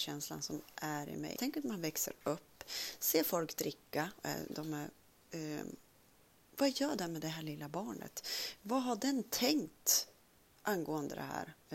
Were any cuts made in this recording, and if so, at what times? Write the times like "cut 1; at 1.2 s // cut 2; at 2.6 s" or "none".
cut 1; at 1.4 s